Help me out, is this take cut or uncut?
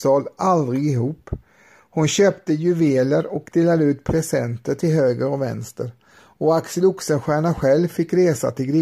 uncut